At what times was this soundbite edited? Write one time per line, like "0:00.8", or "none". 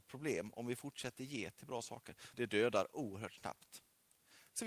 0:02.3